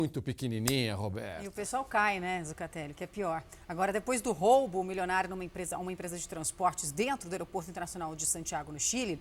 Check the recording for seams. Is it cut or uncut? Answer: uncut